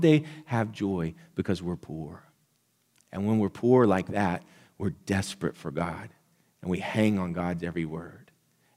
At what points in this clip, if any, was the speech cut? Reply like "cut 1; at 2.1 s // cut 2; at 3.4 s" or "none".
none